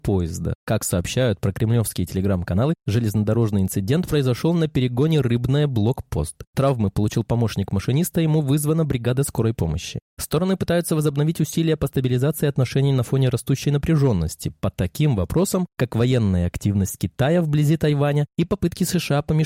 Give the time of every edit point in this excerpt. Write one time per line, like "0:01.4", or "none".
0:10.0